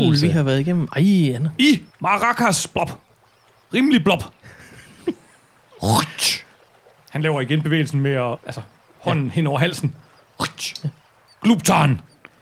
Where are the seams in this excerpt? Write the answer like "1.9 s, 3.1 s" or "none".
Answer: none